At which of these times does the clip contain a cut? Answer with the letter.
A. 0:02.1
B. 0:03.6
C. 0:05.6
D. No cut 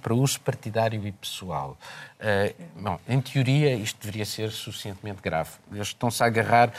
D